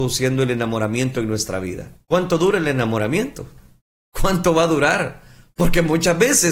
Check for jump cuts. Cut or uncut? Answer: cut